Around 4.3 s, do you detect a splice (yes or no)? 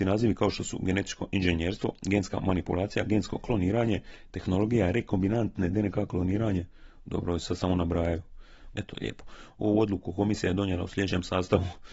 no